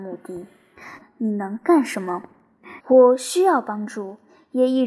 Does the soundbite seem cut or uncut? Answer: cut